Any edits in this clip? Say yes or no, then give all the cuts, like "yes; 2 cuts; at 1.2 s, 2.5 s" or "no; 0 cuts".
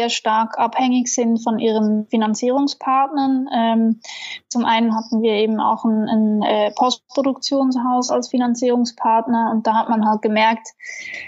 no; 0 cuts